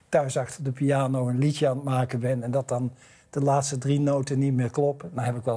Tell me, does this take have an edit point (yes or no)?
no